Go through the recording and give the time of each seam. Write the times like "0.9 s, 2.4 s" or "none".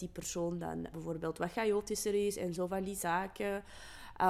0.9 s